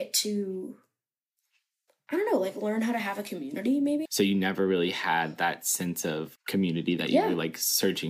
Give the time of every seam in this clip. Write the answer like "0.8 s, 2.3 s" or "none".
4.1 s, 6.4 s